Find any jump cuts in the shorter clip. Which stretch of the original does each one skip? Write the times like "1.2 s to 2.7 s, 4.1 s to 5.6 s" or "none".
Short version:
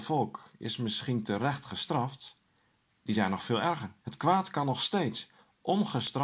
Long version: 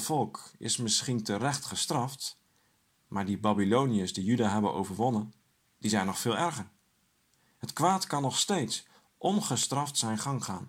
2.8 s to 5.6 s, 6.8 s to 7.6 s

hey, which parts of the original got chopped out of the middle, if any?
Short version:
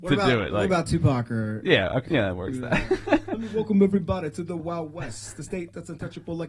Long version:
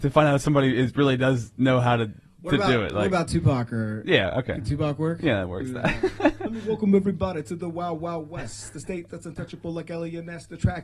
4.5 s to 5.2 s, 7.7 s to 8.0 s

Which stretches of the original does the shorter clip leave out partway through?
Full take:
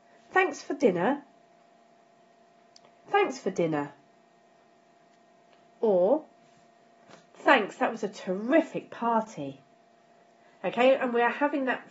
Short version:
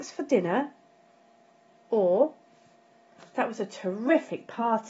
2.2 s to 5.6 s, 7.3 s to 7.8 s

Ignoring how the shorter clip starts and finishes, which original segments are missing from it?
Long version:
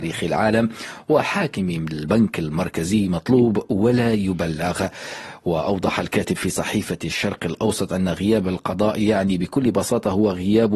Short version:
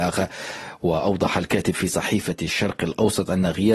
none

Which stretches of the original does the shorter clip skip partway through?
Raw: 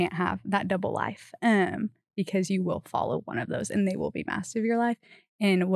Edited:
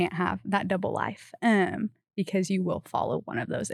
none

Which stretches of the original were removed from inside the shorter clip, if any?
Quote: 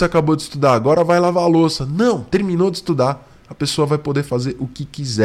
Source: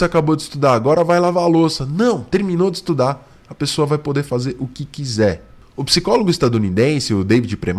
none

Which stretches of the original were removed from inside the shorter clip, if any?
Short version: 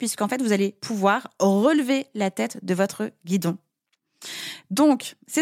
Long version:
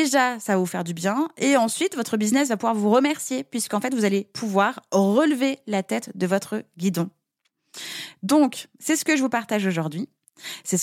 none

